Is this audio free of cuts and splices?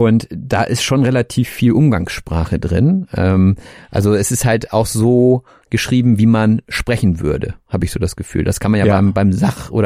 yes; 0 cuts

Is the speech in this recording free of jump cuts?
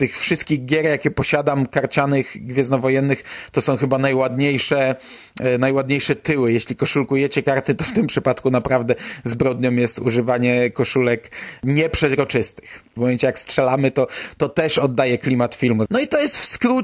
no; 2 cuts; at 13.0 s, 15.9 s

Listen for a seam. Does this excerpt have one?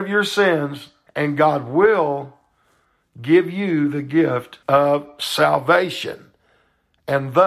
yes; 2 cuts; at 1.1 s, 4.6 s

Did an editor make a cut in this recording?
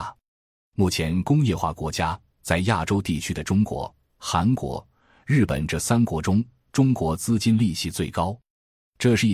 no; 0 cuts

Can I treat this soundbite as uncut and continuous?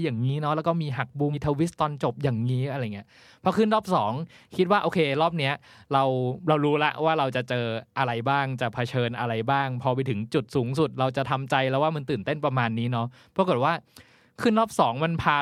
no; 1 cut; at 1.3 s

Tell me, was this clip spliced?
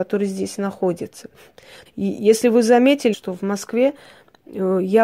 yes; 2 cuts; at 1.9 s, 3.1 s

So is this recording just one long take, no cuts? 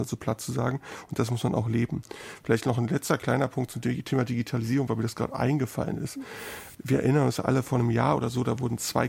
yes; 0 cuts

